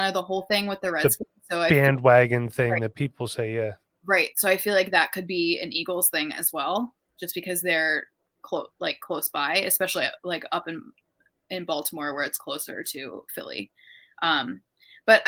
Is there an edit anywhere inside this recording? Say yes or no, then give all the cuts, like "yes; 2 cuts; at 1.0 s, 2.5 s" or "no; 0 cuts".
no; 0 cuts